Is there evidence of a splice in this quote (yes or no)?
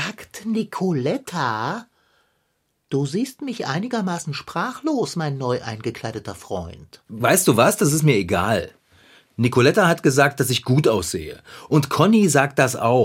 no